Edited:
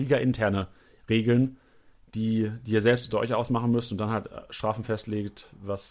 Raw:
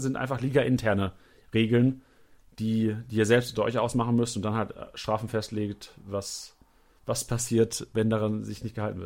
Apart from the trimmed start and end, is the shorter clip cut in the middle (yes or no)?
no